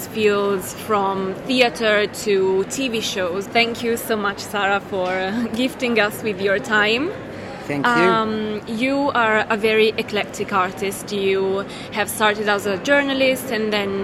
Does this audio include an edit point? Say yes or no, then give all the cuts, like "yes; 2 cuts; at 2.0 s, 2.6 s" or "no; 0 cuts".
yes; 1 cut; at 3.5 s